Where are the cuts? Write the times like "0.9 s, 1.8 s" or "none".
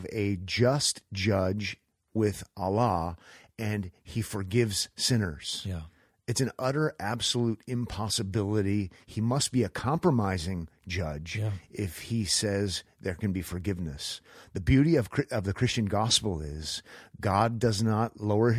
none

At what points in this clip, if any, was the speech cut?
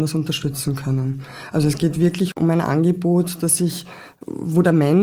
none

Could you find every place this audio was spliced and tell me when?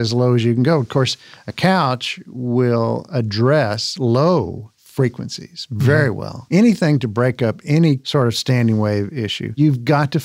6.5 s

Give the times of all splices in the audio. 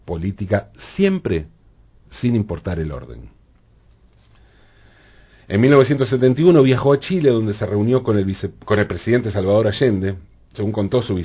none

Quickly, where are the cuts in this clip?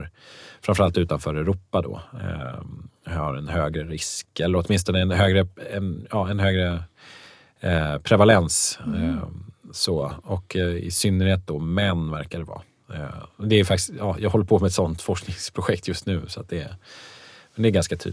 none

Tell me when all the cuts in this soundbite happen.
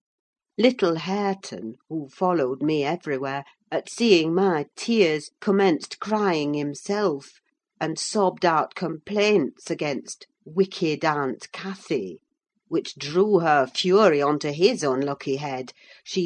3.6 s

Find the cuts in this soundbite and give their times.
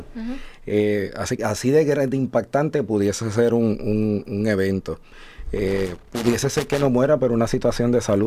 1.4 s

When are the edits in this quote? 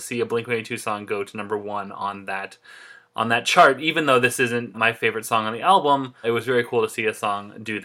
4.7 s, 6.2 s

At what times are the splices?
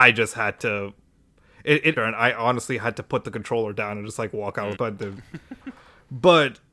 2.0 s, 4.8 s

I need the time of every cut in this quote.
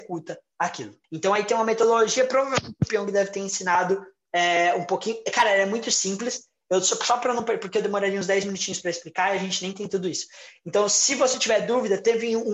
1.0 s

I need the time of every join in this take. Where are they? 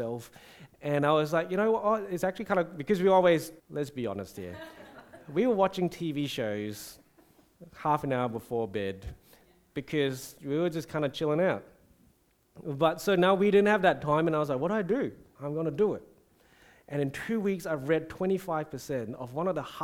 3.6 s, 15.3 s

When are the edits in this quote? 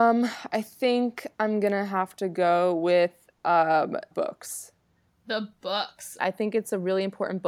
4.1 s, 6.2 s

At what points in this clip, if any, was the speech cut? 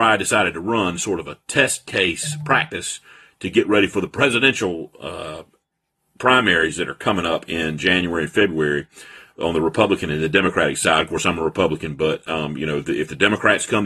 none

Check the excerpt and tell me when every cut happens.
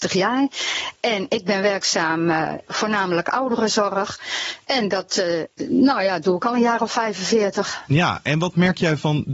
2.7 s

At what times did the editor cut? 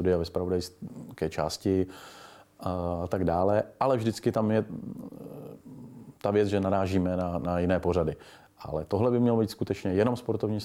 none

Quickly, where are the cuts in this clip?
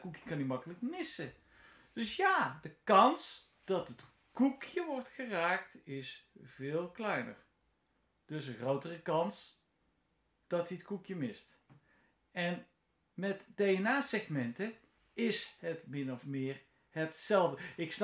none

